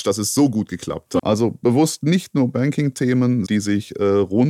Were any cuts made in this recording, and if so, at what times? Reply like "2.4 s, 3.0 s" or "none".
1.2 s, 3.5 s